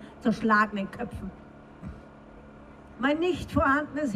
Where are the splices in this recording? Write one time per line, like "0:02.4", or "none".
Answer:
0:02.9